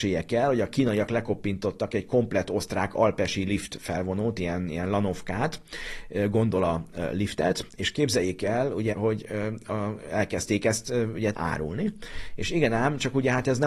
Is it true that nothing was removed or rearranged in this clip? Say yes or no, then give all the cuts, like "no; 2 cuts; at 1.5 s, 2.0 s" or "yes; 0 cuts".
no; 2 cuts; at 8.9 s, 11.3 s